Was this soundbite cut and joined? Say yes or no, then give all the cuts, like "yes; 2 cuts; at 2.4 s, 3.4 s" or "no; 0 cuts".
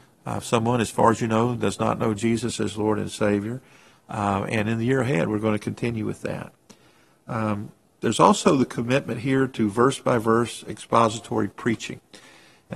yes; 1 cut; at 3.9 s